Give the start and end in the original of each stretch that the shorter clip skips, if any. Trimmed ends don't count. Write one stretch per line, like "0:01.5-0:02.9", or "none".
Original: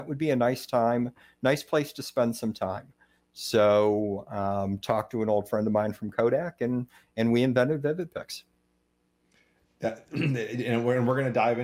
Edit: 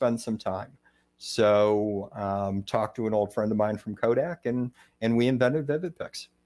none